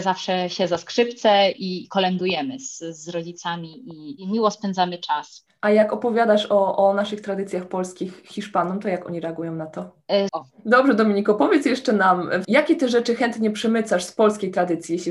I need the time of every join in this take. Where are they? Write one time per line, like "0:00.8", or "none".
0:01.8
0:10.3
0:12.4